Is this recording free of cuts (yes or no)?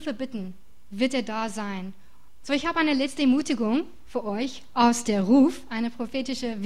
no